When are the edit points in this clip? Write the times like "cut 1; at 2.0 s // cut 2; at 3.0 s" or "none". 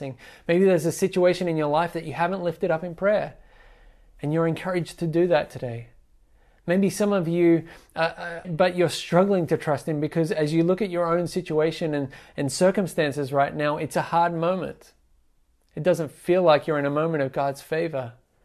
cut 1; at 8.4 s